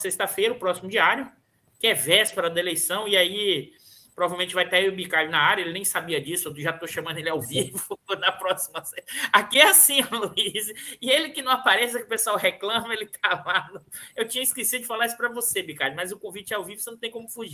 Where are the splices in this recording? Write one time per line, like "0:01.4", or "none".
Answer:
none